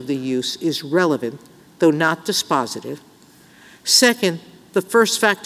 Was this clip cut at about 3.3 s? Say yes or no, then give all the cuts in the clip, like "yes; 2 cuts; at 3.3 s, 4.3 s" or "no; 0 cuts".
no; 0 cuts